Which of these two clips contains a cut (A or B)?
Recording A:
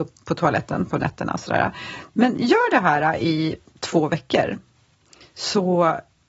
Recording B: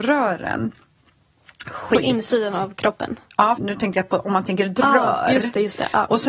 B